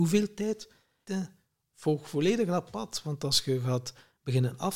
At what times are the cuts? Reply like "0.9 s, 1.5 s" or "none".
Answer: 1.0 s

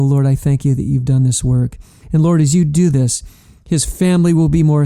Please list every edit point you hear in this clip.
2.0 s

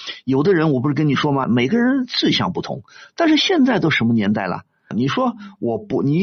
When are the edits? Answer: 1.4 s, 4.9 s

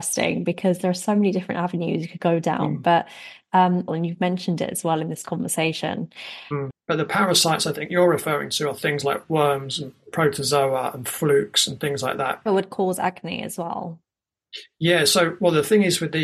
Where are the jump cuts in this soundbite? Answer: 3.9 s, 6.7 s, 12.5 s

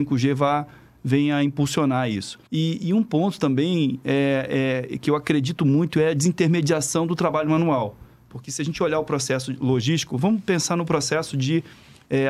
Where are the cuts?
2.5 s

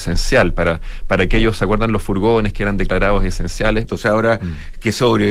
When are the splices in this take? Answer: 3.9 s

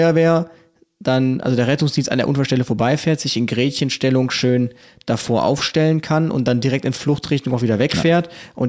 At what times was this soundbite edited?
none

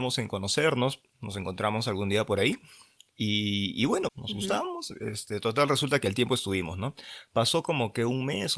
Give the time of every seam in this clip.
4.1 s

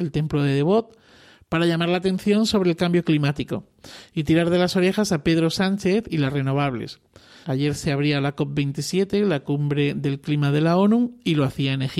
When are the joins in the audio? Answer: 7.4 s

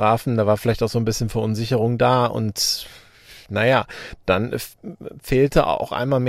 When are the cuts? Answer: none

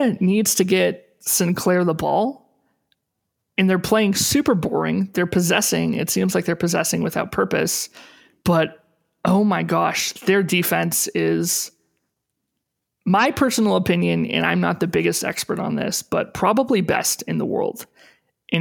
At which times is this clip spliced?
none

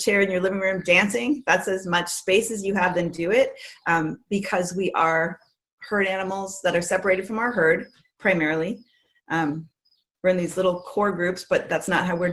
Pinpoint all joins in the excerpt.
none

